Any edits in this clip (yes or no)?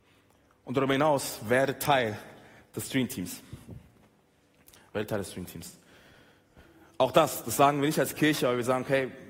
no